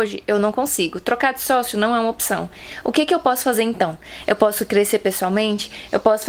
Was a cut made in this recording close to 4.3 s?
no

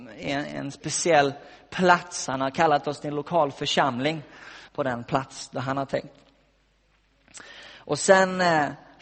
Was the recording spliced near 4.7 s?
yes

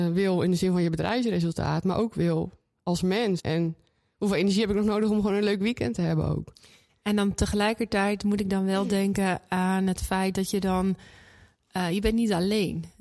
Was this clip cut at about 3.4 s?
yes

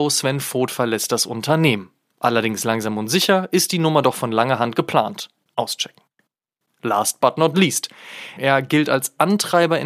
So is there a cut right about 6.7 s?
no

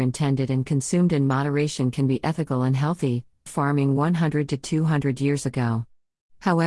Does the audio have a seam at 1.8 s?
no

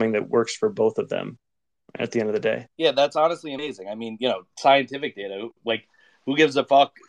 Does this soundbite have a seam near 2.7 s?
yes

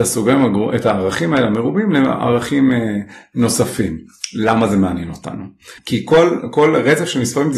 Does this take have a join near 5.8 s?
yes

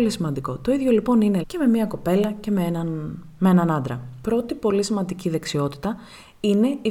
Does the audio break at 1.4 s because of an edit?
yes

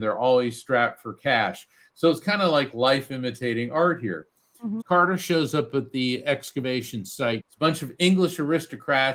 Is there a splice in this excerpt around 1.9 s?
no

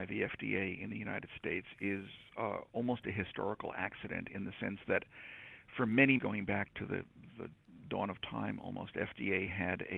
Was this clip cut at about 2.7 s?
no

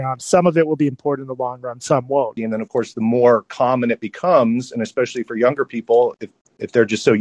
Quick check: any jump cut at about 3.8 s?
no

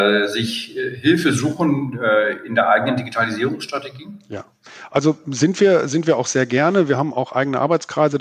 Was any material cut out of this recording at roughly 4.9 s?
no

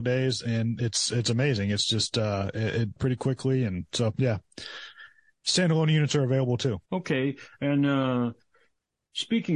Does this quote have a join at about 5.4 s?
no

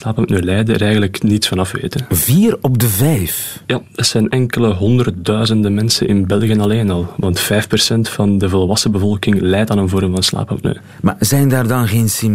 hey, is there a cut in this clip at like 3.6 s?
yes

